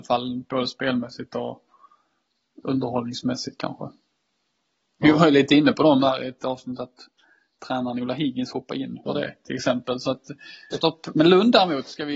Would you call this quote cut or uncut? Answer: cut